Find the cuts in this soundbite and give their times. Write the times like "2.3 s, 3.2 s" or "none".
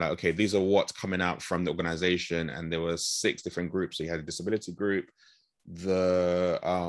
none